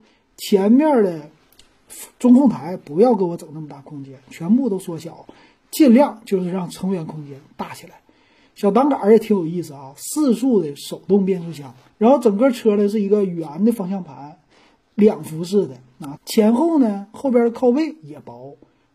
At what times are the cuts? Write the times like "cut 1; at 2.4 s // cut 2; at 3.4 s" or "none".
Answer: cut 1; at 11.9 s // cut 2; at 16.2 s